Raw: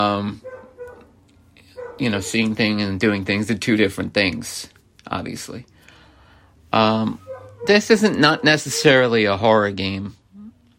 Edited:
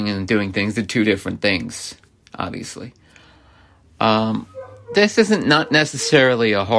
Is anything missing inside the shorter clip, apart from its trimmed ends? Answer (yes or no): no